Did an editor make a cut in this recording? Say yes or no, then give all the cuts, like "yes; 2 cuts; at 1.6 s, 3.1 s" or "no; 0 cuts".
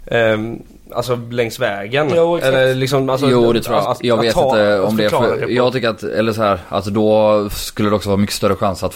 yes; 1 cut; at 3.8 s